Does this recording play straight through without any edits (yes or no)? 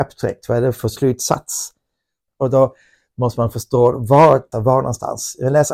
no